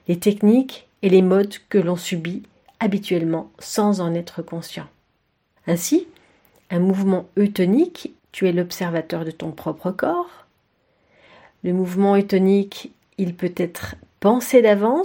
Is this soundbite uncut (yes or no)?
no